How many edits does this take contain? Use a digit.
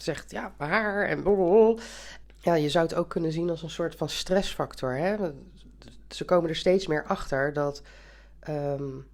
1